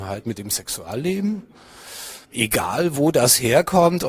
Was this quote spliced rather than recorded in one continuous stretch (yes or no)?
yes